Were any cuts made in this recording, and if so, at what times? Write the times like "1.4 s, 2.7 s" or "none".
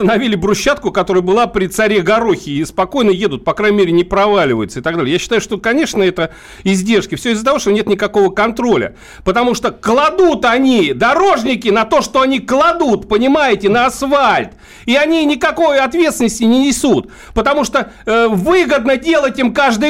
none